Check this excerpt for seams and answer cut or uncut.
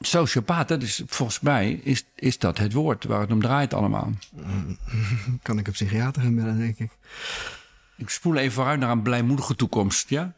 uncut